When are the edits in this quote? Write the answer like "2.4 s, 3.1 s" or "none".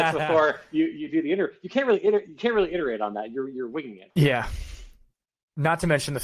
4.1 s